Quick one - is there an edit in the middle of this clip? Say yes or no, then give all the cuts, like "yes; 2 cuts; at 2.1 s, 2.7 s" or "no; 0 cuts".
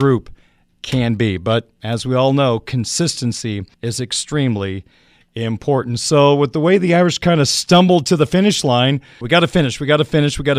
yes; 2 cuts; at 3.7 s, 9.2 s